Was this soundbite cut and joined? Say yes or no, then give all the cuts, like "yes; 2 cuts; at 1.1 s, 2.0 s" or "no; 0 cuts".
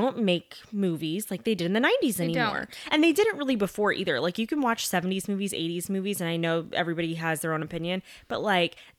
no; 0 cuts